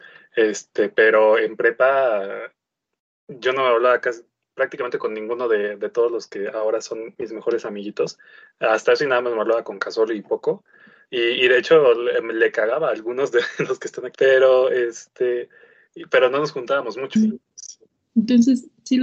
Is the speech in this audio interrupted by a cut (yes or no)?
yes